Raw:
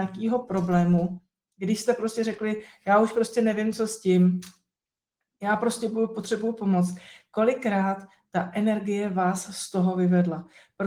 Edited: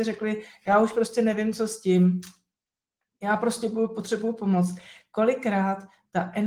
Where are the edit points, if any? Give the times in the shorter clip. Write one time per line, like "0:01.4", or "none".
none